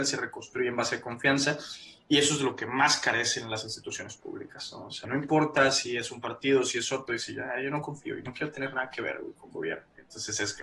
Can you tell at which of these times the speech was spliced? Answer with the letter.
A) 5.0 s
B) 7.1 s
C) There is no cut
A